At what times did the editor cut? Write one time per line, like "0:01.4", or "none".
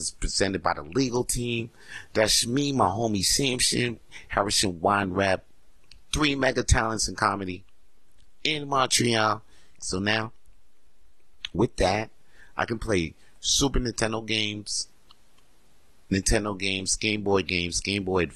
0:09.8